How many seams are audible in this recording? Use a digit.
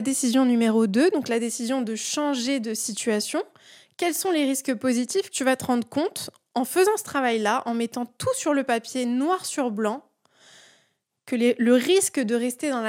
1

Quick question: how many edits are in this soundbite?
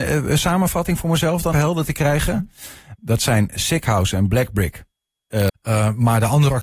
3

